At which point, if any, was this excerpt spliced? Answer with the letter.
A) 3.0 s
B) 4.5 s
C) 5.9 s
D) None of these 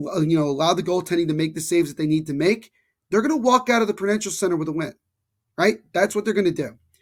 D